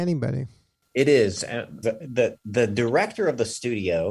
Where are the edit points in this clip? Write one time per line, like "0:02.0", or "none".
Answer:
0:01.8